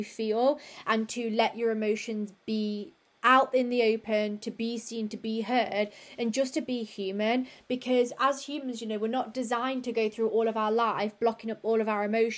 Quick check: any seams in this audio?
no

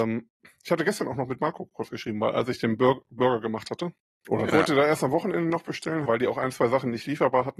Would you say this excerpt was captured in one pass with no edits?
no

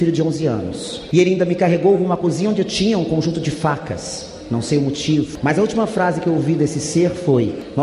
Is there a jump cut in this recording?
no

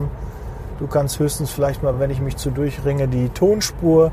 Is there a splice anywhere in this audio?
no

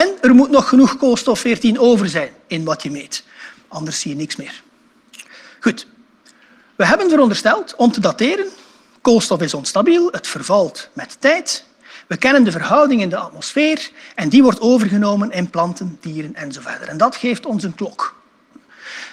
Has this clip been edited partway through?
no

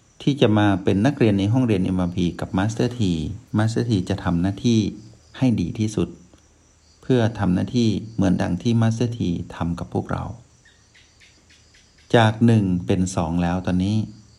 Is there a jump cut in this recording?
yes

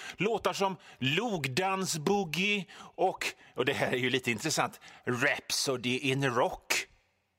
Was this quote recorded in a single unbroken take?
yes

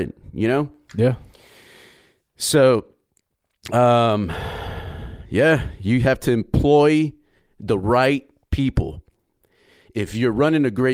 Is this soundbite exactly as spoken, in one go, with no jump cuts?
yes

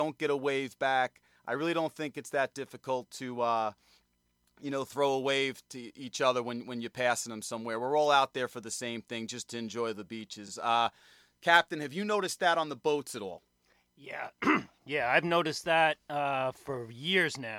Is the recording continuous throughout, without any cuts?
yes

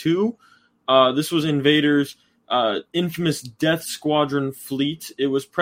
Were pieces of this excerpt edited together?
no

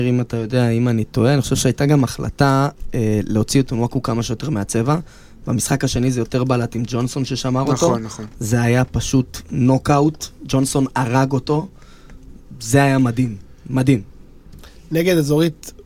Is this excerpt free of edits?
yes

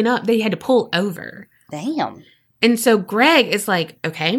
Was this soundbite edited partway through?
no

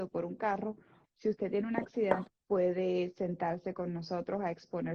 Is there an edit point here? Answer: yes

